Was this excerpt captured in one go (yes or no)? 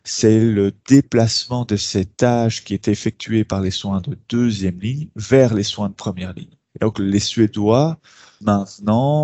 yes